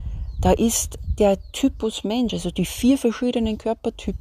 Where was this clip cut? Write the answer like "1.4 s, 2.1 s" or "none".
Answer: none